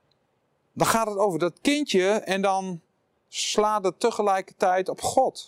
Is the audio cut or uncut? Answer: uncut